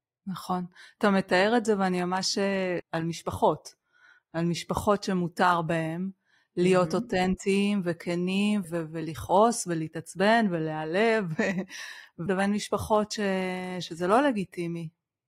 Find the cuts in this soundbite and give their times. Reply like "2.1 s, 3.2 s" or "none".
2.8 s, 8.6 s, 12.3 s